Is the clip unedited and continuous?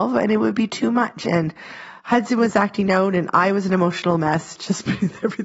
no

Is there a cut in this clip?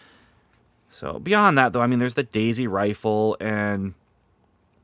no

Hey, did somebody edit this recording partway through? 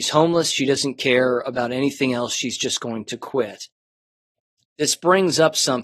no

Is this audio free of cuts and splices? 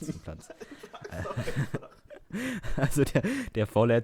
yes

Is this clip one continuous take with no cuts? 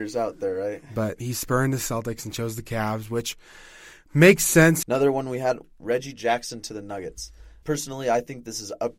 no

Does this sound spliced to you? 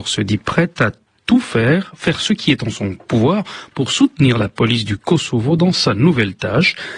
no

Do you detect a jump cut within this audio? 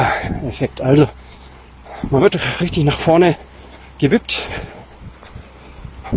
no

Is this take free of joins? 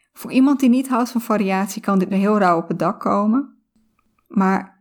no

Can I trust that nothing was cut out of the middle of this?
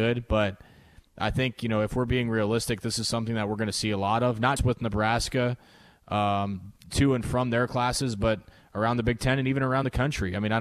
no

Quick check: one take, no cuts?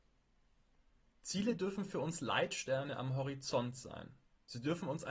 yes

